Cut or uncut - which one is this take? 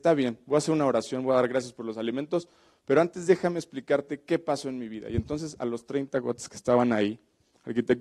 uncut